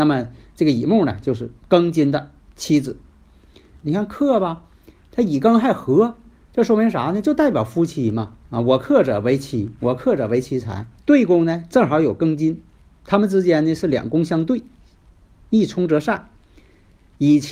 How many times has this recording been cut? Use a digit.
3